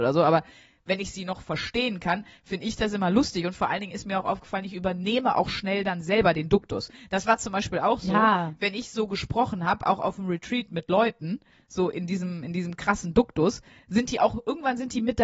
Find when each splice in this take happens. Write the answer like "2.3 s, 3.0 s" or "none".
none